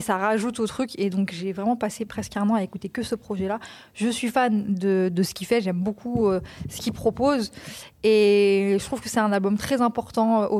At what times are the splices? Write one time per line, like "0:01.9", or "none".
none